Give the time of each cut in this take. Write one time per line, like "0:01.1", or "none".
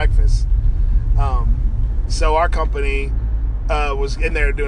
none

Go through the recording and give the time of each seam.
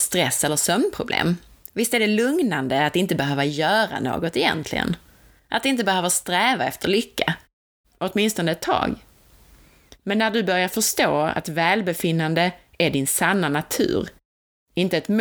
0:07.8

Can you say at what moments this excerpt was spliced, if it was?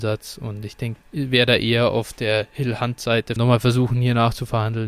0:01.0
0:03.4

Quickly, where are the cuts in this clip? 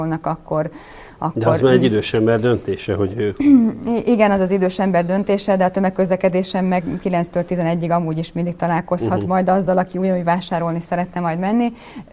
none

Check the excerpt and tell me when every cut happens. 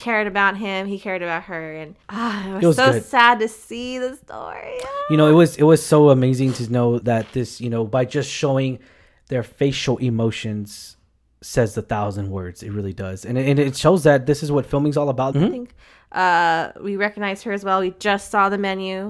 0:02.0
0:07.0
0:15.3

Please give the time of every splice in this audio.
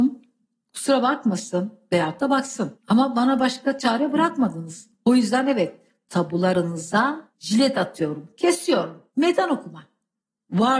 none

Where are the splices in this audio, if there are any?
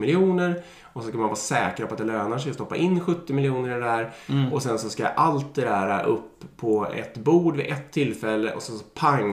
none

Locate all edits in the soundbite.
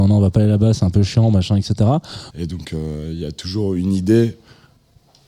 0:02.3

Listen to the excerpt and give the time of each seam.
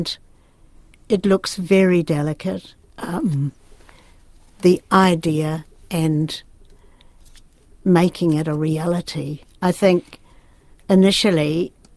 0:02.8

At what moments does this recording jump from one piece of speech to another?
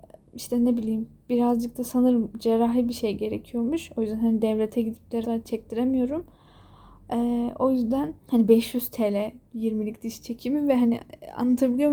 0:05.2
0:08.2

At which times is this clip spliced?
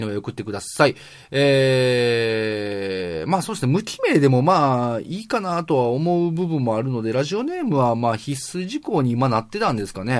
none

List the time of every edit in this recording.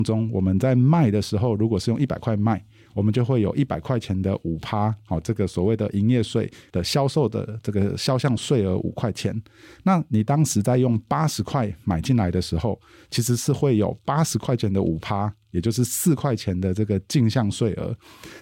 0:06.7

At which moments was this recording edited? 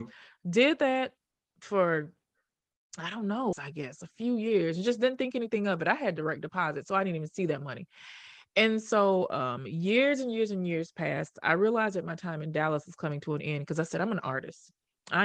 0:03.5

